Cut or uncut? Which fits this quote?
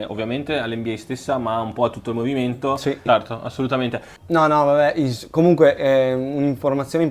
cut